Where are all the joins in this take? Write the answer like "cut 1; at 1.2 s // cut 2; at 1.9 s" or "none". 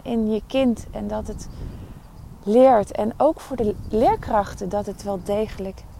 none

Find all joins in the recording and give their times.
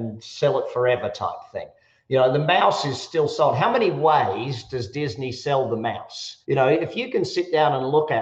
none

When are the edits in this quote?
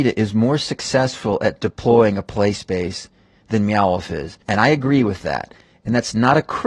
cut 1; at 4.4 s

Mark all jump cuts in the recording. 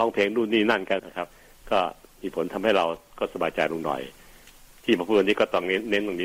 cut 1; at 1.0 s

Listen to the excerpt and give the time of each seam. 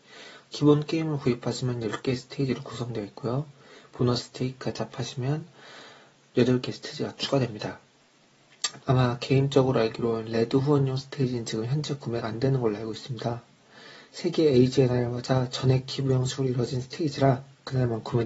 cut 1; at 8.8 s

